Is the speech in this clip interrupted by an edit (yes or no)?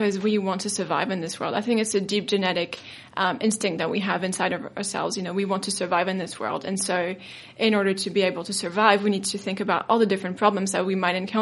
no